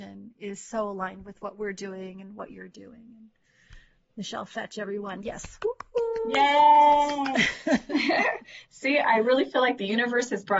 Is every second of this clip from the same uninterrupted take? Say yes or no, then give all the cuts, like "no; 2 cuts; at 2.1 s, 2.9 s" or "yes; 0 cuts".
no; 1 cut; at 4.0 s